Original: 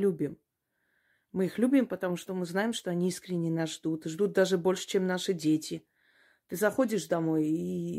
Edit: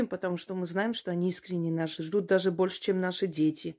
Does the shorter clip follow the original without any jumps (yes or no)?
no